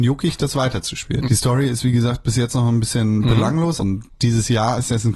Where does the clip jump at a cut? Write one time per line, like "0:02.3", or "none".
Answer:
0:01.2
0:03.8